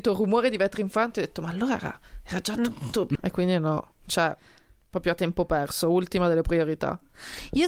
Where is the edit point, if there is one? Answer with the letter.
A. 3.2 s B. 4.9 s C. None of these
A